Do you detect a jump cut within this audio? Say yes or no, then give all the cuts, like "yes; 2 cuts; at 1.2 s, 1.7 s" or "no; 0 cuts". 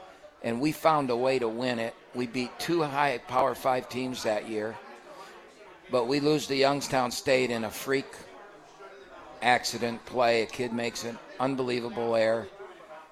no; 0 cuts